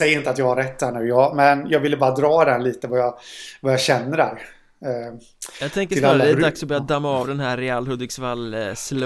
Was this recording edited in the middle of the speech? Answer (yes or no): no